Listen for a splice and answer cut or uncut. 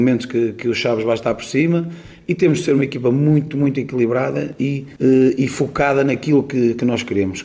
uncut